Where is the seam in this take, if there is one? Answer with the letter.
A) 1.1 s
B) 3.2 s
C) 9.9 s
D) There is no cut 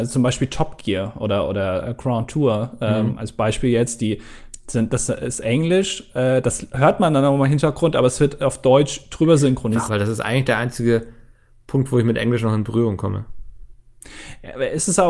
C